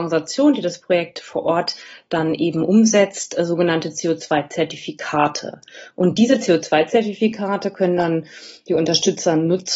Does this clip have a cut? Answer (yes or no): no